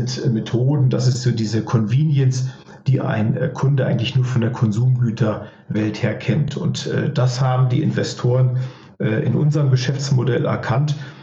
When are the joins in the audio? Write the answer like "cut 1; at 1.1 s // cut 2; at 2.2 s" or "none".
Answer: none